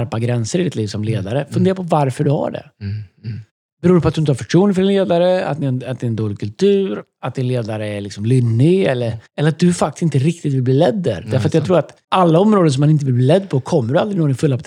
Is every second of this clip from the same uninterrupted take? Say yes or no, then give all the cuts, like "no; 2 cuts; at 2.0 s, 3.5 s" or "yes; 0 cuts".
no; 2 cuts; at 9.3 s, 12.0 s